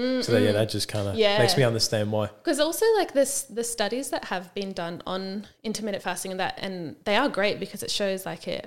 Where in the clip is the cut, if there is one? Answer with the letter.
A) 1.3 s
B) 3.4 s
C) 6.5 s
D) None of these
D